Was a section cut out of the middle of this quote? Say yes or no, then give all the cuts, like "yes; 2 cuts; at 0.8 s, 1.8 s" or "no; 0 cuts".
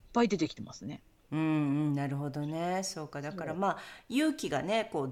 no; 0 cuts